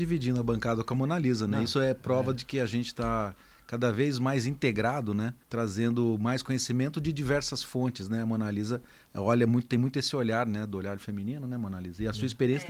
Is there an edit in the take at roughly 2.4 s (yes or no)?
no